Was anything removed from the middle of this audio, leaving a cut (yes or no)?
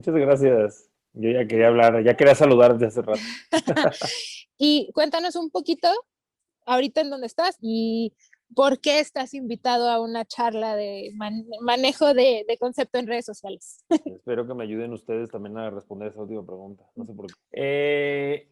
yes